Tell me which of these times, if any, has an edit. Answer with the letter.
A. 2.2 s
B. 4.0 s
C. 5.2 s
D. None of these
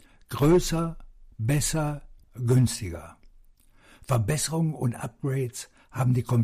A